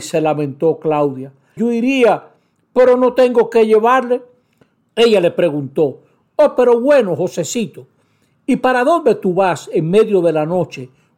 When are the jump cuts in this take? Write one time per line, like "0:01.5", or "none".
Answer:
0:01.6
0:04.9